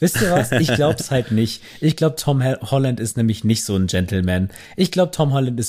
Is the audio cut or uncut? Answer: uncut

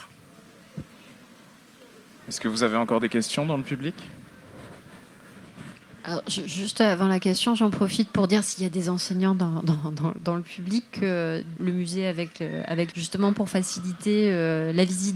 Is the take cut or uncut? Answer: cut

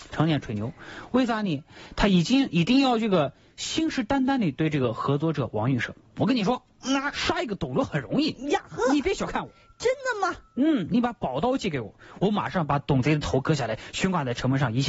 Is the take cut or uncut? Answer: uncut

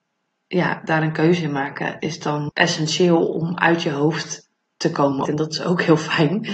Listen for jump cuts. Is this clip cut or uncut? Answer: cut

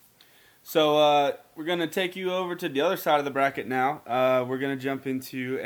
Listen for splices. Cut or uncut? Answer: uncut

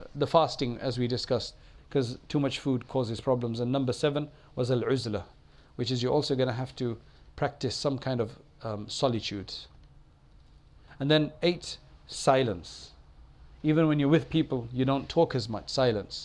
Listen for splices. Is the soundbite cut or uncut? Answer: cut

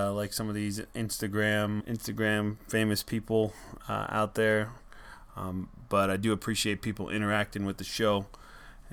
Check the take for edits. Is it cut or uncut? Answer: cut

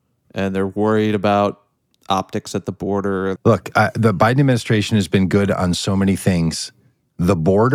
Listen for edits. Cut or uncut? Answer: cut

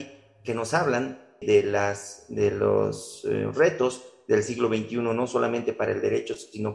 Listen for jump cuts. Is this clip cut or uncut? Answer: cut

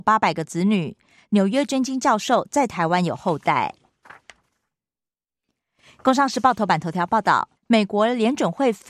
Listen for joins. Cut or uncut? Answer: cut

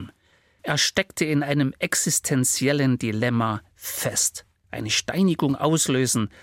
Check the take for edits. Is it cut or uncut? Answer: uncut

